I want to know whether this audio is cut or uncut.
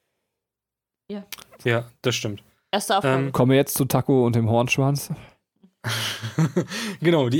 uncut